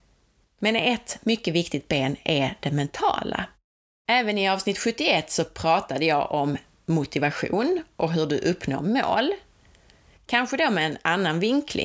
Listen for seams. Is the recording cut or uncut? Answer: cut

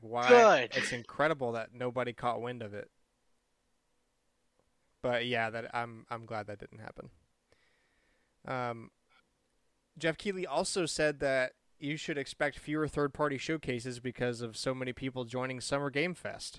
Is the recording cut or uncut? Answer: uncut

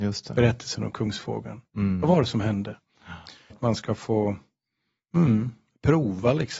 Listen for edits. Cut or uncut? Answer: cut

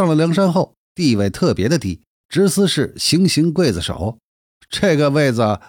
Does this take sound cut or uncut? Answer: cut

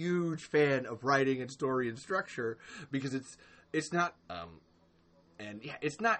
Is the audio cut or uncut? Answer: cut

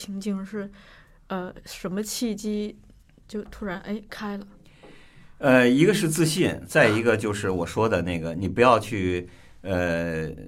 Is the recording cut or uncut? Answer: uncut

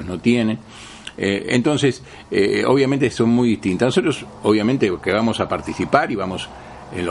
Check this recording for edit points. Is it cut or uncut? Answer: uncut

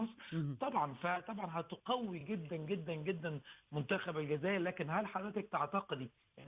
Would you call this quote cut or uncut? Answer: uncut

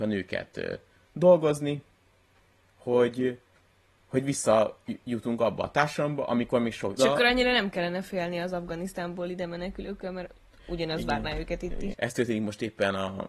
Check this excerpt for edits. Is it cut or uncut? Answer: cut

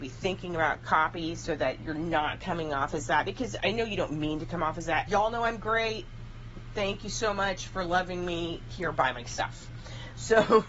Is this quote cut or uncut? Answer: cut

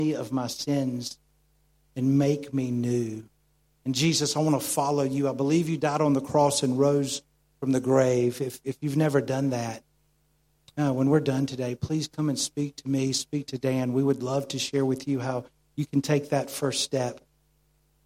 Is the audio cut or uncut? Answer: uncut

